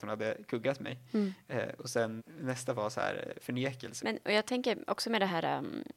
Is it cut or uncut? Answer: cut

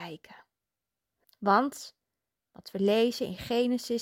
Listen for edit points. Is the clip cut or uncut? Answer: cut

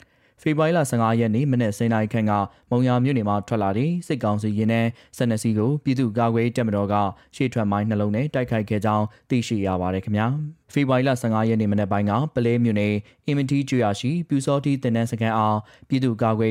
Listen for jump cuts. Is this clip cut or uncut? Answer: cut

